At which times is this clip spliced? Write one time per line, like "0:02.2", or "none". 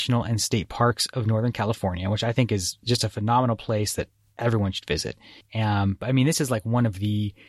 0:05.4